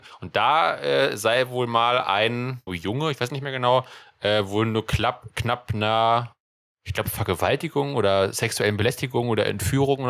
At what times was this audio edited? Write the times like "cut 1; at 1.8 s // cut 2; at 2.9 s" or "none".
cut 1; at 2.7 s